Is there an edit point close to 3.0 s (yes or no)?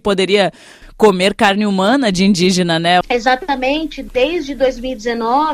yes